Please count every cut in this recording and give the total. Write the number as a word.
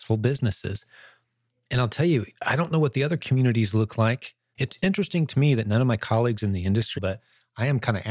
three